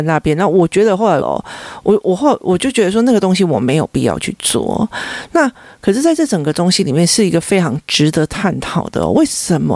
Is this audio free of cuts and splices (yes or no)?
no